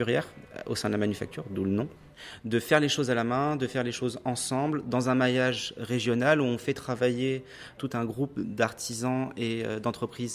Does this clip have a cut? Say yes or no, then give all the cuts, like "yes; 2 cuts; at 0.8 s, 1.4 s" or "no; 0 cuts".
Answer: no; 0 cuts